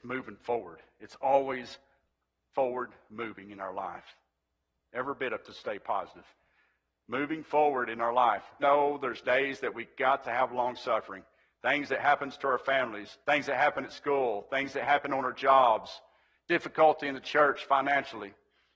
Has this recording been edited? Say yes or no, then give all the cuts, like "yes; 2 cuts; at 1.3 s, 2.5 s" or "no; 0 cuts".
yes; 2 cuts; at 8.6 s, 13.2 s